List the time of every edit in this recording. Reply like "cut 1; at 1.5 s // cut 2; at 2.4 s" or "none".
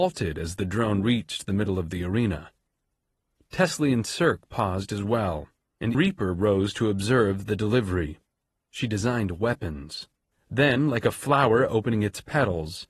cut 1; at 5.9 s // cut 2; at 8.6 s // cut 3; at 10.3 s

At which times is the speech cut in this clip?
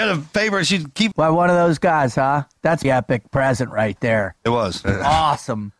cut 1; at 1.1 s // cut 2; at 2.8 s // cut 3; at 4.8 s

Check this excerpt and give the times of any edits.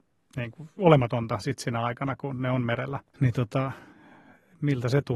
cut 1; at 3.1 s

